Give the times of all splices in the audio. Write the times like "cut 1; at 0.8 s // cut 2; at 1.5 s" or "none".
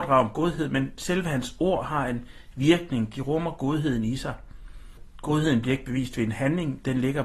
none